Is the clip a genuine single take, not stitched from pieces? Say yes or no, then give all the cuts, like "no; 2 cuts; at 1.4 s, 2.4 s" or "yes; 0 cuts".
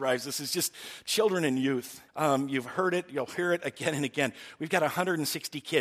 no; 1 cut; at 2.1 s